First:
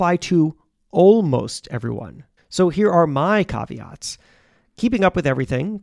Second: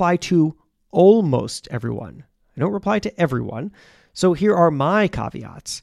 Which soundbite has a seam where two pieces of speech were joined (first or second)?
first